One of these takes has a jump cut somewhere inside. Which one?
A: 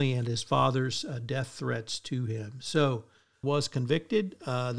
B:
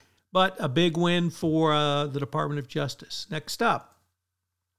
A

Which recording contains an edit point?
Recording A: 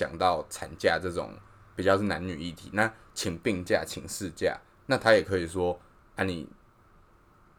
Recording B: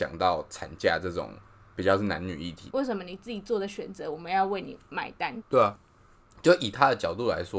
B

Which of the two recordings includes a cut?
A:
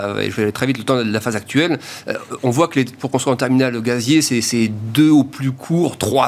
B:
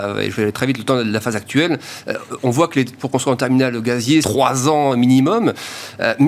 B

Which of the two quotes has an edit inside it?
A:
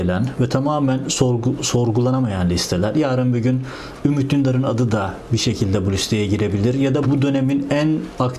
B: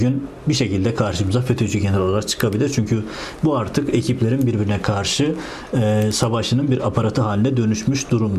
A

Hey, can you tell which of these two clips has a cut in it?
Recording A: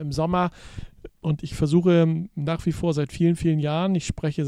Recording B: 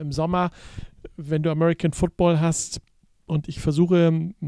A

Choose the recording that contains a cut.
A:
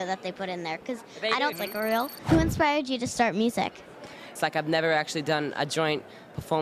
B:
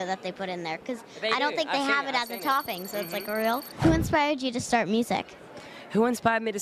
A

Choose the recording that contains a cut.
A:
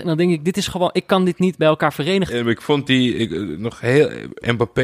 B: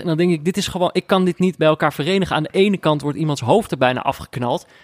A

